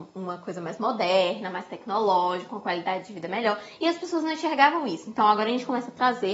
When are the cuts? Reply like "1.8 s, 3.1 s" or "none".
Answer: none